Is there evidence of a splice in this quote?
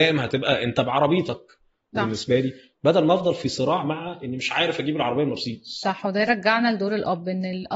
yes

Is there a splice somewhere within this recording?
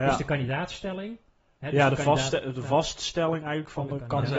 no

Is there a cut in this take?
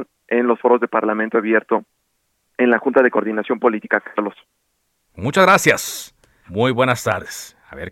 yes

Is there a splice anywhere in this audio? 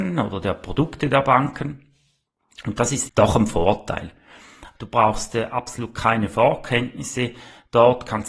yes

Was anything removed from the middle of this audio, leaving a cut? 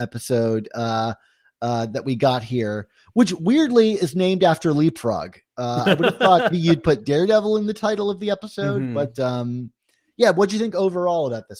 yes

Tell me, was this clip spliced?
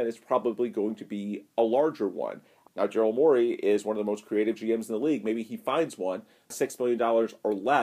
yes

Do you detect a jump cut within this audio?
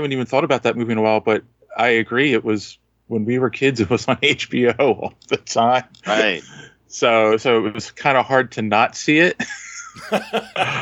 no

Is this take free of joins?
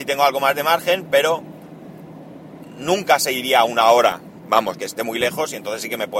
no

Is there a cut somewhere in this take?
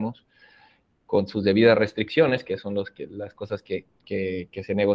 yes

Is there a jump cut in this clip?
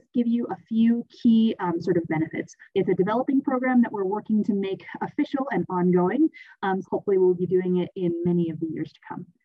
yes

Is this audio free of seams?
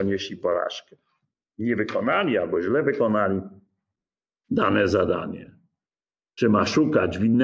yes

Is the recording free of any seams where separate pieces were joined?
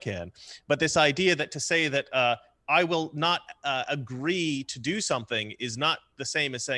yes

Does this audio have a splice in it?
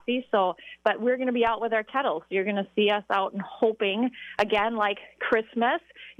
no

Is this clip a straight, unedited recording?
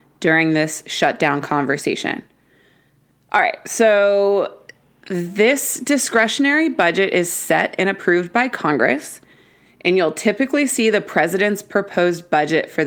yes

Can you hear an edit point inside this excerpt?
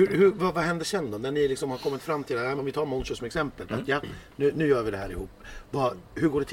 yes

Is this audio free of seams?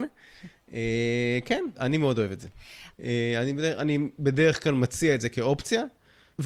no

